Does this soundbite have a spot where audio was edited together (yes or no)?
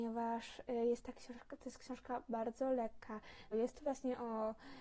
yes